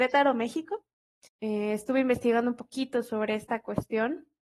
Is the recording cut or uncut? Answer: cut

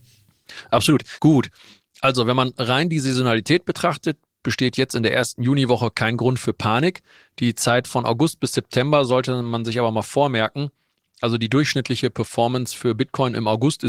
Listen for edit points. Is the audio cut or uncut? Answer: cut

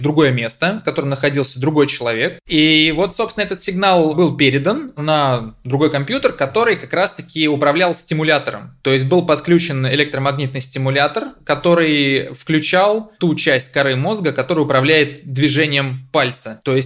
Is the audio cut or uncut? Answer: uncut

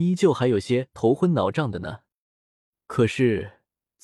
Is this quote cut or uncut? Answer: uncut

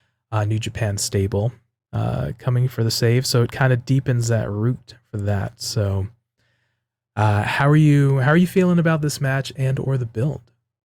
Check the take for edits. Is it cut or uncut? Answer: uncut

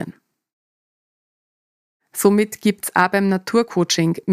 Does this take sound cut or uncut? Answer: uncut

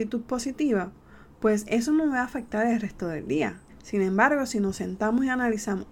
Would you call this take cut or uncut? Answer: cut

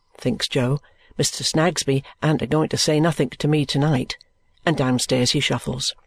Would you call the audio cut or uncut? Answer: uncut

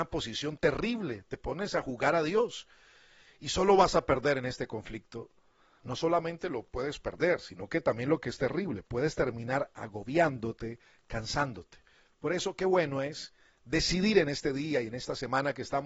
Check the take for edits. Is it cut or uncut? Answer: cut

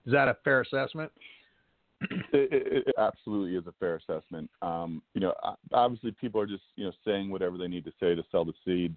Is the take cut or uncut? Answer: cut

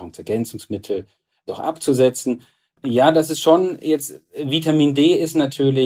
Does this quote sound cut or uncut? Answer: cut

